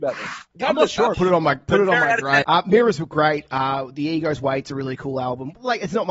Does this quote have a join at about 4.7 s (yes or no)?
no